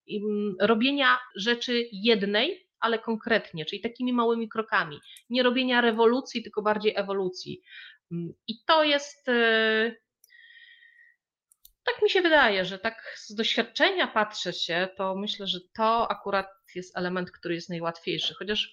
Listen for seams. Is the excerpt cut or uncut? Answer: cut